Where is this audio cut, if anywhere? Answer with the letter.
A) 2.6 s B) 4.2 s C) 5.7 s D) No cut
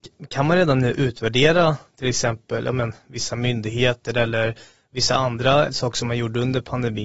C